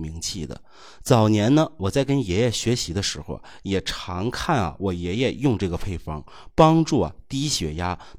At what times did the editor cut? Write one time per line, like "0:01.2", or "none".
none